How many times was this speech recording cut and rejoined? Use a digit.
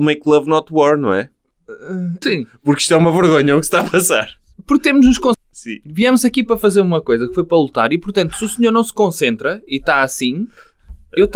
2